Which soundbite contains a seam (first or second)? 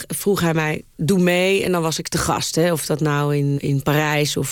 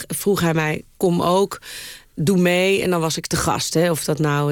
first